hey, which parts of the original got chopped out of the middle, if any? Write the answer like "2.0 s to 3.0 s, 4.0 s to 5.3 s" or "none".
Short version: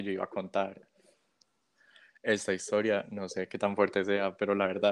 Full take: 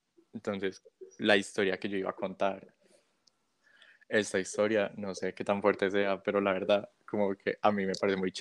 none